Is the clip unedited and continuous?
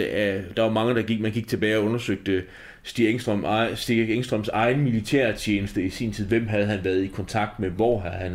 yes; 0 cuts

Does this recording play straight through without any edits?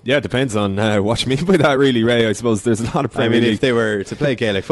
yes; 0 cuts

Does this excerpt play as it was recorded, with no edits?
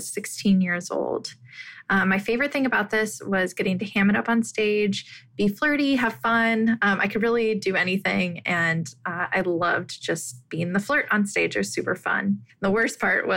yes; 0 cuts

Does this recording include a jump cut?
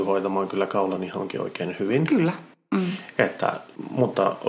no; 0 cuts

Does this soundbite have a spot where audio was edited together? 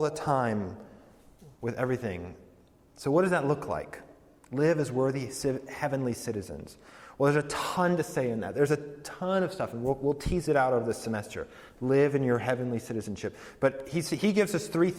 no; 0 cuts

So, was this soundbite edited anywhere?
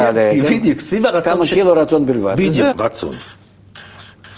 yes; 1 cut; at 2.7 s

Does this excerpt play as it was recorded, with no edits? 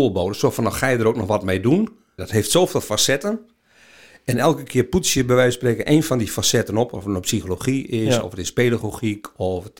no; 1 cut; at 2.2 s

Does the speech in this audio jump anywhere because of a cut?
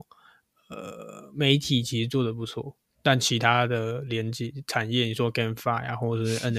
no; 0 cuts

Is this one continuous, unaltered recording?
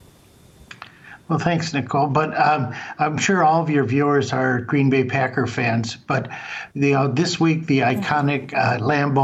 yes; 0 cuts

